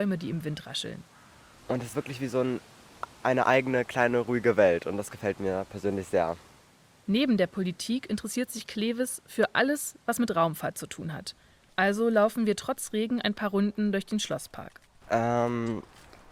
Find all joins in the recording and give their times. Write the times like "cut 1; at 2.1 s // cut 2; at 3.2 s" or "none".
cut 1; at 1.9 s // cut 2; at 11.7 s // cut 3; at 15.0 s